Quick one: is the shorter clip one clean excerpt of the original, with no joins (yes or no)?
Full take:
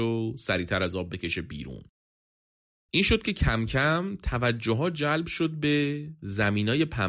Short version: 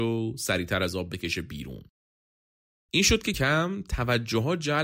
no